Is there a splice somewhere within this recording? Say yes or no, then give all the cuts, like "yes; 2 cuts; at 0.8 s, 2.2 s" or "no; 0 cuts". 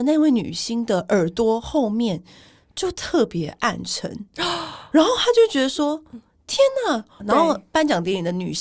yes; 1 cut; at 7.2 s